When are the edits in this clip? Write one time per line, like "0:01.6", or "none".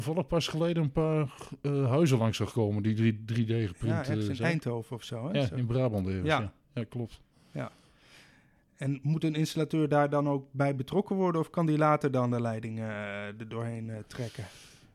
none